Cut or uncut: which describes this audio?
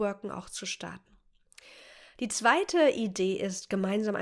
uncut